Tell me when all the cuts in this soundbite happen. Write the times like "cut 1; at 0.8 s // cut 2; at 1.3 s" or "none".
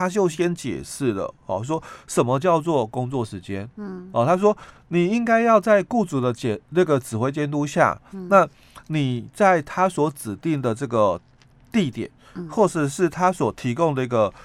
none